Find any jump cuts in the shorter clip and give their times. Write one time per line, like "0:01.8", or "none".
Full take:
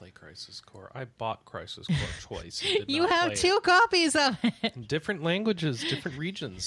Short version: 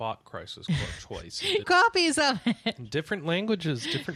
0:01.6